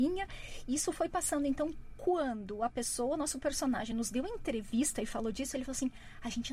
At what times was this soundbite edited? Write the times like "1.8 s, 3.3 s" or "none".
none